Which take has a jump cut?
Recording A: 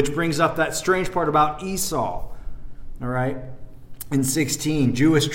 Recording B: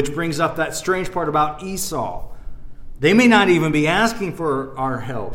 B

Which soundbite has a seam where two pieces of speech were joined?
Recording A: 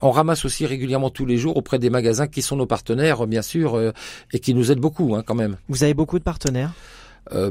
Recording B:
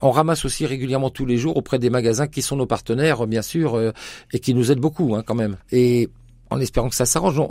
B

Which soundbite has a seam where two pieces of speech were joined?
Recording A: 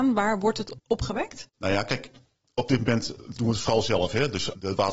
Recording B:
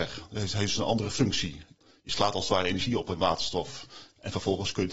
A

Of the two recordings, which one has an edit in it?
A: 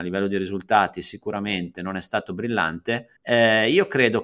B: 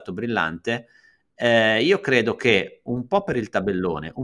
A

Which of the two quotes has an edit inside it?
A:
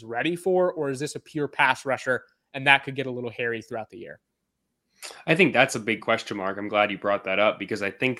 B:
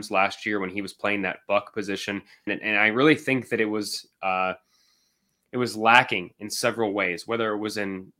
B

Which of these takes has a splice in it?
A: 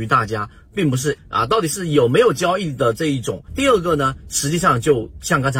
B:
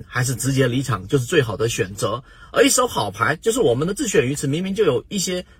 A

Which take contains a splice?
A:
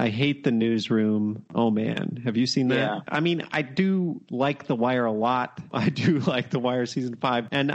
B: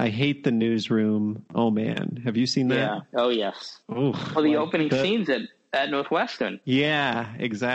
A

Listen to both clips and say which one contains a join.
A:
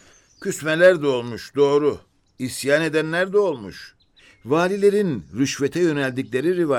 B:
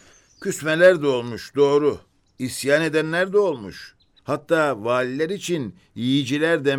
B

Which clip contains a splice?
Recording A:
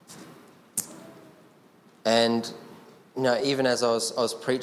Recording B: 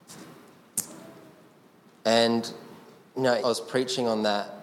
B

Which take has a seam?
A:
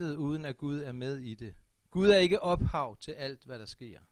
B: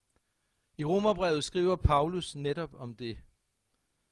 A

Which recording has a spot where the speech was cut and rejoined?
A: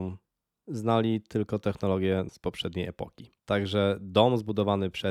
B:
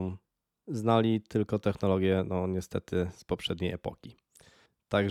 A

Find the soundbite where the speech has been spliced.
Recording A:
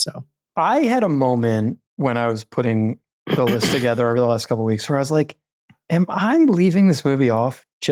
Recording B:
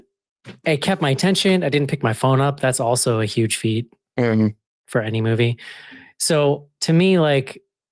A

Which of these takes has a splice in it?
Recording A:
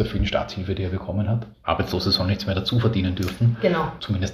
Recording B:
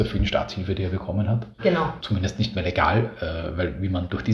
B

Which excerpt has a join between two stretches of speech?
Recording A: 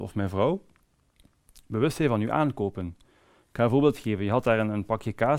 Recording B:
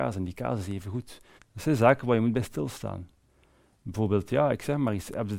B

